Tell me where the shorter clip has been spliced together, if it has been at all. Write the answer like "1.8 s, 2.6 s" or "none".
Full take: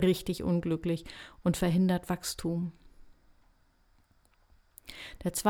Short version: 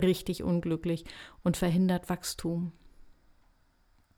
none